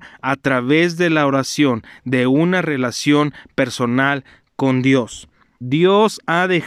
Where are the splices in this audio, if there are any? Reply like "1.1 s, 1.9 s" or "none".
5.6 s